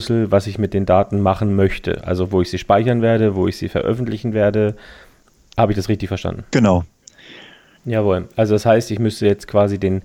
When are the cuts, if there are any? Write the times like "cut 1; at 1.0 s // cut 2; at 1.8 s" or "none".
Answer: cut 1; at 7.8 s